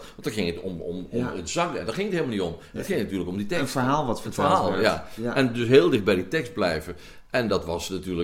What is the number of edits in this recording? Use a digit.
0